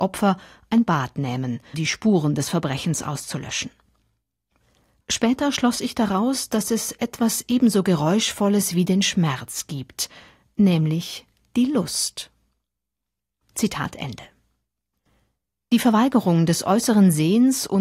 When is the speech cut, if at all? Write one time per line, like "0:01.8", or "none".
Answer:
0:01.7